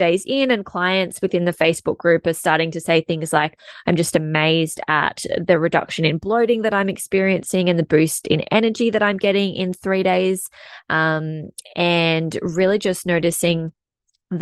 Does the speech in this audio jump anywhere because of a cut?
no; 0 cuts

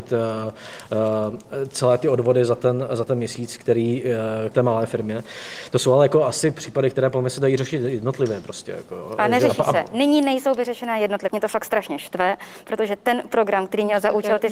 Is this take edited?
yes; 2 cuts; at 4.5 s, 11.3 s

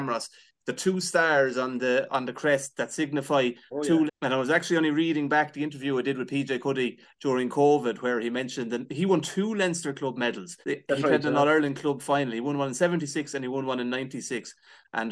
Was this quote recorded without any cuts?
no; 2 cuts; at 4.1 s, 10.6 s

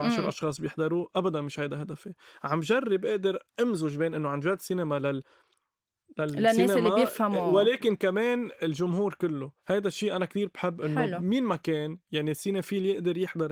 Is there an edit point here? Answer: yes; 1 cut; at 9.6 s

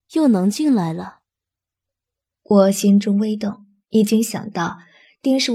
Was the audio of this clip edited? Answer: no; 0 cuts

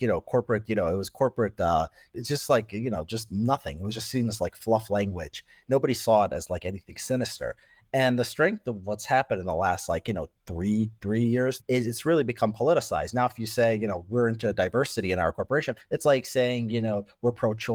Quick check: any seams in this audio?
yes; 1 cut; at 11.6 s

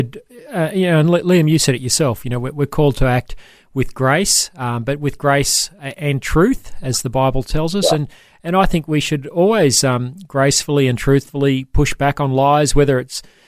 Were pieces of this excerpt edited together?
no; 0 cuts

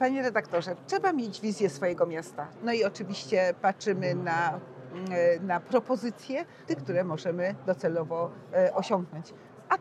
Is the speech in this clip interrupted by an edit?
yes; 2 cuts; at 2.6 s, 6.7 s

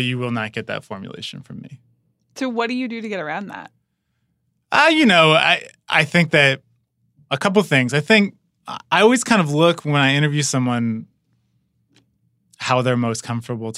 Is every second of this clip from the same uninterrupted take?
yes; 0 cuts

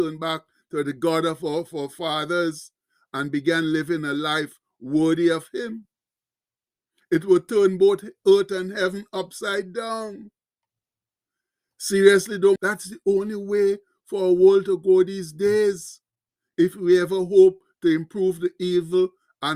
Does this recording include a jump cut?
yes; 1 cut; at 12.6 s

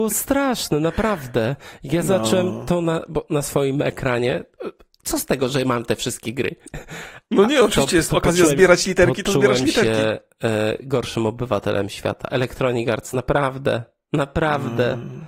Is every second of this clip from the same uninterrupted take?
yes; 0 cuts

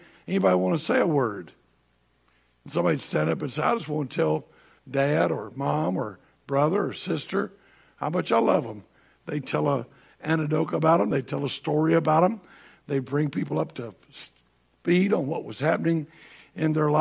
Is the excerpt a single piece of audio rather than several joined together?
yes; 0 cuts

